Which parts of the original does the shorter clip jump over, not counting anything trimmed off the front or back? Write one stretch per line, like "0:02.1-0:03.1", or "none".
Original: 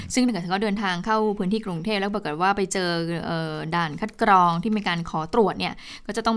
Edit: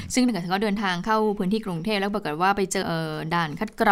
0:02.8-0:03.2